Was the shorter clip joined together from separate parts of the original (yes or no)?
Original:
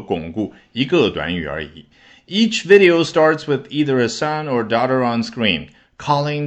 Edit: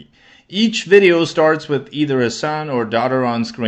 no